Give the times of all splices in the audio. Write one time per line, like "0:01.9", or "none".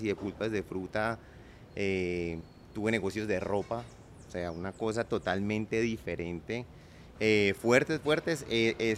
0:07.1